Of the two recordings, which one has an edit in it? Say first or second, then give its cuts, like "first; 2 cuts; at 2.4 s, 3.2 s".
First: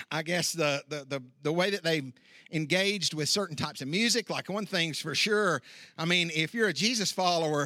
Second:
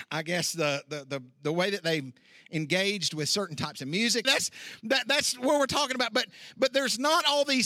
second; 1 cut; at 4.2 s